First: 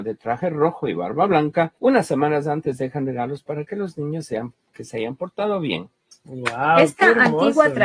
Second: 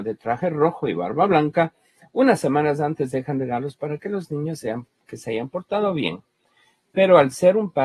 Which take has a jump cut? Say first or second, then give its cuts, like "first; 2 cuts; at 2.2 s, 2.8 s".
first; 2 cuts; at 1.8 s, 6.1 s